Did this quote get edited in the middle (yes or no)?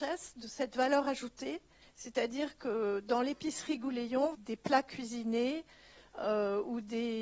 yes